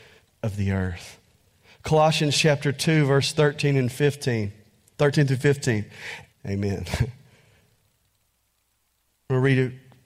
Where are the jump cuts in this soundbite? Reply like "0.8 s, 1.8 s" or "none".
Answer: 6.3 s